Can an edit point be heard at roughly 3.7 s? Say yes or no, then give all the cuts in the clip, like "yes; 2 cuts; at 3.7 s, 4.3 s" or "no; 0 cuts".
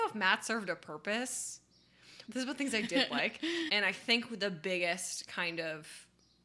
yes; 2 cuts; at 2.3 s, 3.7 s